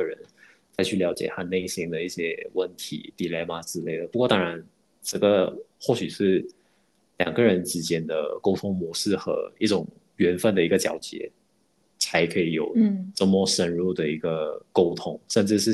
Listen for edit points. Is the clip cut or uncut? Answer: uncut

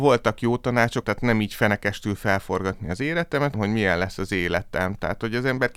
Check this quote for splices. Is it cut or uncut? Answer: cut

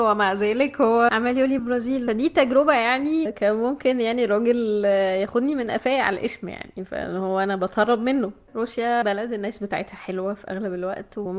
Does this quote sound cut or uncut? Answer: cut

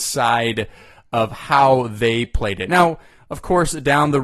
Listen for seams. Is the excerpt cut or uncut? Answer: uncut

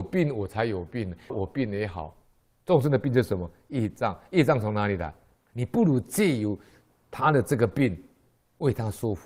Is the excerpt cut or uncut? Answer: cut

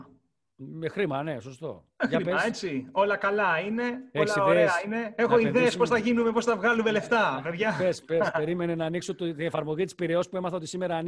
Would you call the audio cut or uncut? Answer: uncut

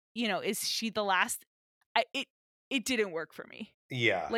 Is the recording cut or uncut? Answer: uncut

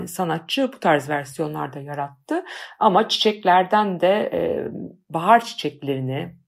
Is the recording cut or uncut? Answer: uncut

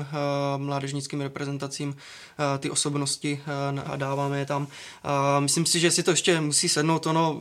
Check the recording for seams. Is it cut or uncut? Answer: cut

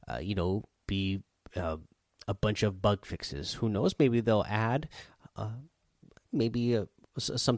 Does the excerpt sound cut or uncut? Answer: uncut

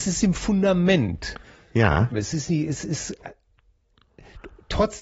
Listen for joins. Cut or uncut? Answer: cut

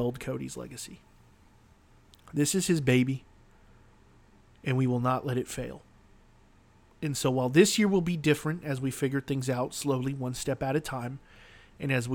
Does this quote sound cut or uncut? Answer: uncut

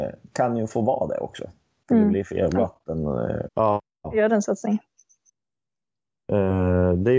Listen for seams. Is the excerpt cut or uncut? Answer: cut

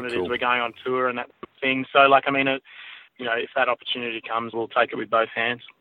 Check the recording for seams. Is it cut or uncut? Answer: cut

